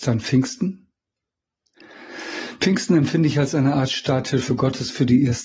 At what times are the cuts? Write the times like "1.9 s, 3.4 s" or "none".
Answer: none